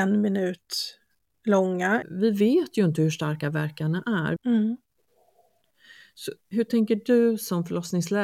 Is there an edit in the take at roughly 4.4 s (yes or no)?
yes